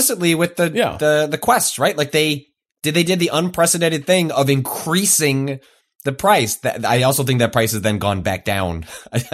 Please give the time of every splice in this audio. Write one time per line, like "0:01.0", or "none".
none